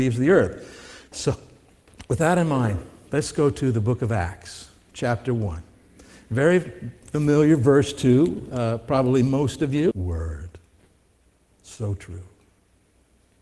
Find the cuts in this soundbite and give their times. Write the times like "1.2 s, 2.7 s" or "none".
1.1 s, 9.9 s